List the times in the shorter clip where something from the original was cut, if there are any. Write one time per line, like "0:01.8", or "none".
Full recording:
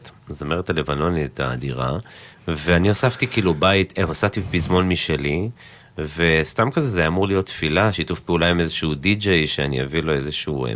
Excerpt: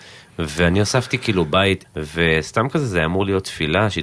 0:01.8